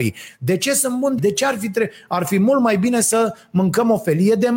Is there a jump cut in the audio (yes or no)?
yes